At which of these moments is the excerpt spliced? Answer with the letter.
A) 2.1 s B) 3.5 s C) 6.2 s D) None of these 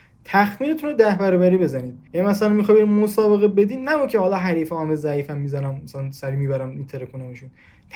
A